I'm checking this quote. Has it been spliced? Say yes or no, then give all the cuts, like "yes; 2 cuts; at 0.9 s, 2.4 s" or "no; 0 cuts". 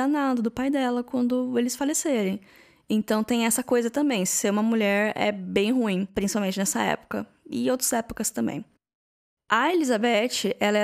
no; 0 cuts